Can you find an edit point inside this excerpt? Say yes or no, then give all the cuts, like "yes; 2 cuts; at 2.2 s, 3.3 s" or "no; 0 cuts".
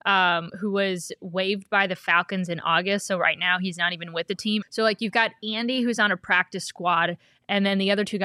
yes; 1 cut; at 4.6 s